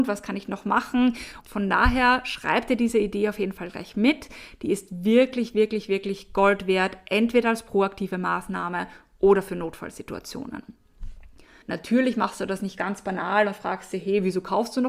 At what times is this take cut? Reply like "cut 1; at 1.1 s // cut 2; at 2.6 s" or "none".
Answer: cut 1; at 1.4 s // cut 2; at 11.6 s